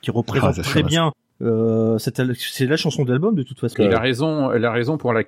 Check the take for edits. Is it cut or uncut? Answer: cut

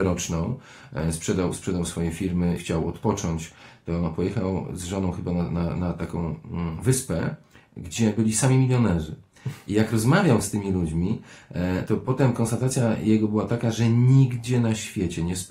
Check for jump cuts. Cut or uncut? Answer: cut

